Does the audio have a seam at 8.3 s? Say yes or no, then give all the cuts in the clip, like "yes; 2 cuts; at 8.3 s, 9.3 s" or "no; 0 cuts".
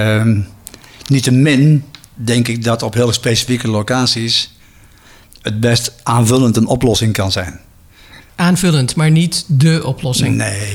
yes; 1 cut; at 8.3 s